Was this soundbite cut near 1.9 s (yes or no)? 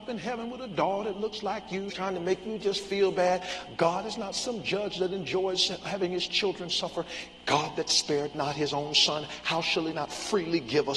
yes